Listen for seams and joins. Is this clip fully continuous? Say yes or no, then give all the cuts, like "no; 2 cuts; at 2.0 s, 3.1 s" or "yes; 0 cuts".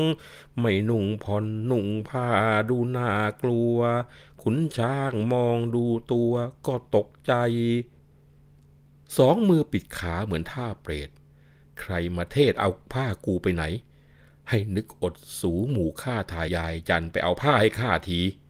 no; 1 cut; at 16.5 s